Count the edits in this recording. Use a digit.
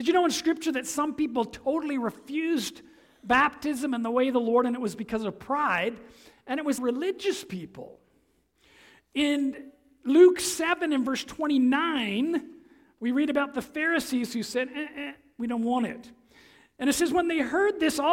1